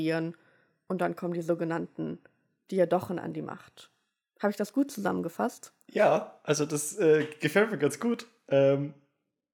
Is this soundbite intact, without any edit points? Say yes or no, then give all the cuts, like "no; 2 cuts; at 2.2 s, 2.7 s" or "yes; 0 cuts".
yes; 0 cuts